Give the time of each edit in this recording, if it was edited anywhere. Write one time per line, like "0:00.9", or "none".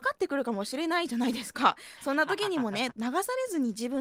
0:02.9